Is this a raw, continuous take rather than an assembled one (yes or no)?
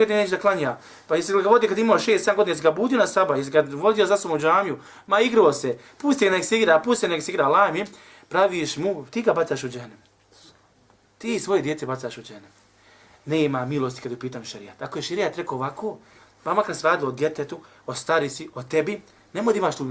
yes